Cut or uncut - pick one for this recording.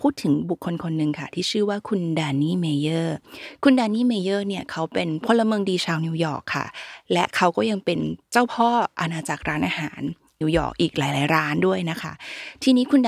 cut